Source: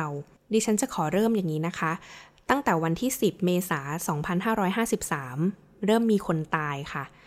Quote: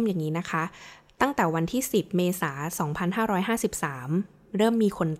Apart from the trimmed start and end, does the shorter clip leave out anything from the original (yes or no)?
no